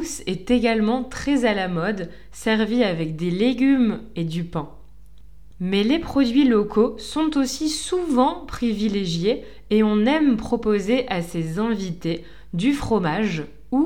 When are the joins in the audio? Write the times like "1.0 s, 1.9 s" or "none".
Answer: none